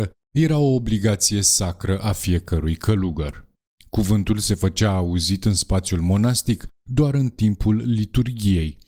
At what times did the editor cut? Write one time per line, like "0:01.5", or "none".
0:03.8